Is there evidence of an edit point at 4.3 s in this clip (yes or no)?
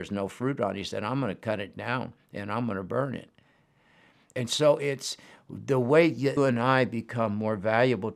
no